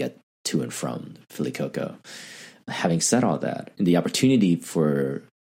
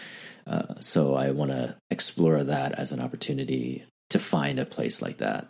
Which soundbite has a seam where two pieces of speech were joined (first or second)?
first